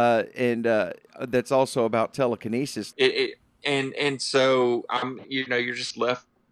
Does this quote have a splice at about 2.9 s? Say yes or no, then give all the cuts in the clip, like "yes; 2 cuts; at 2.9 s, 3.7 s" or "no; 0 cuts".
yes; 1 cut; at 2.9 s